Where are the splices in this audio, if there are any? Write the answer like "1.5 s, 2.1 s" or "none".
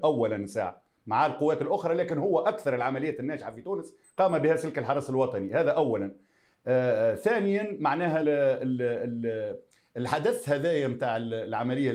8.2 s